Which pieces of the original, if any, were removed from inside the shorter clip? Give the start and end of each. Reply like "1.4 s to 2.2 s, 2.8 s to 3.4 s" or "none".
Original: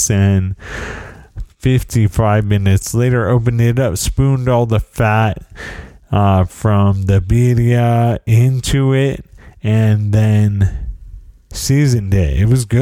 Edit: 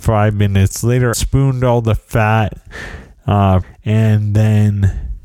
3.2 s to 4.0 s, 6.5 s to 9.4 s

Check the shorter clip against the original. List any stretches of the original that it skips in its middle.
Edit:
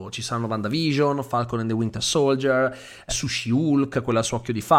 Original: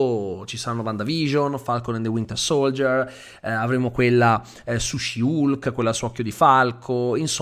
3.4 s to 4.8 s

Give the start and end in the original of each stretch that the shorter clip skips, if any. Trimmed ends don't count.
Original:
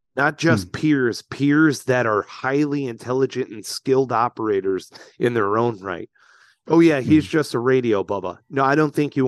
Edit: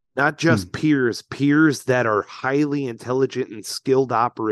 none

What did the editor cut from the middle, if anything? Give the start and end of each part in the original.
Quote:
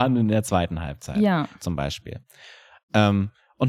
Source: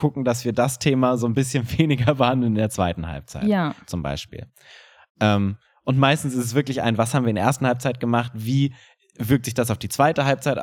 none

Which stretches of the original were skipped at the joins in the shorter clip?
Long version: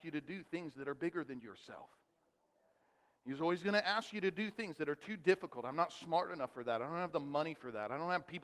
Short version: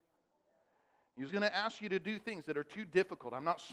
3.4 s to 3.6 s

